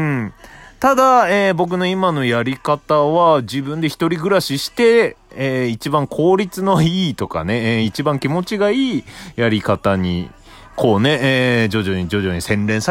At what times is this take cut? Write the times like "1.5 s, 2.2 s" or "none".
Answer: none